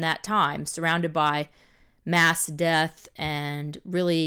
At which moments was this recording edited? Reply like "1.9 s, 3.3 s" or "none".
none